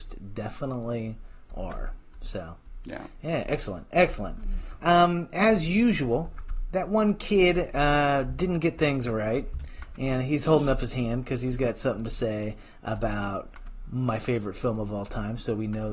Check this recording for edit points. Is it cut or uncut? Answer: cut